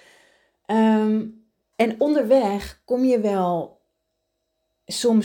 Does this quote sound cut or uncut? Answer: cut